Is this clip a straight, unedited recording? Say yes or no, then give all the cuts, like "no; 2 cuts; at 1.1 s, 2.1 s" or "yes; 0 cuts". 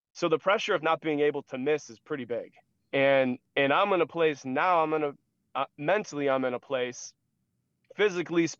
yes; 0 cuts